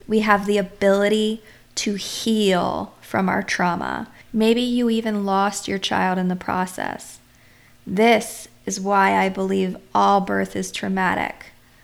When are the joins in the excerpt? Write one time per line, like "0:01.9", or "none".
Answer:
0:04.2